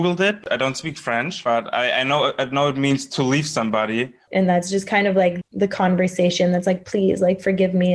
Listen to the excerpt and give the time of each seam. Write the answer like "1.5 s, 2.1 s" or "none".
4.3 s, 5.4 s